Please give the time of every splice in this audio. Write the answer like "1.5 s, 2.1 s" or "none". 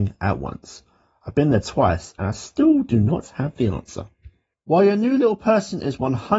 4.5 s

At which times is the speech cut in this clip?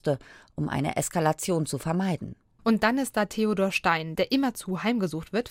4.2 s

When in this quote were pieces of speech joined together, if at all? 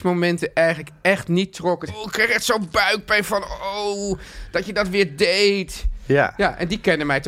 1.9 s

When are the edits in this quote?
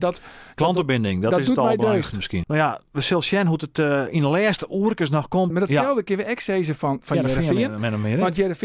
2.4 s, 5.5 s

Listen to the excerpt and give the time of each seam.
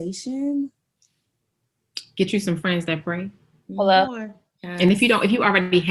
none

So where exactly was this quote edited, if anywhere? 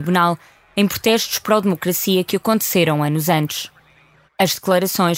4.3 s

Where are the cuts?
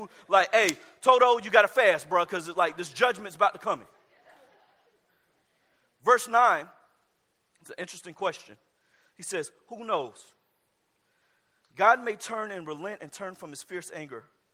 none

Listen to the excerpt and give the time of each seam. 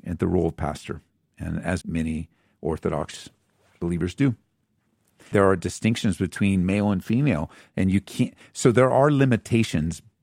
1.8 s, 5.3 s

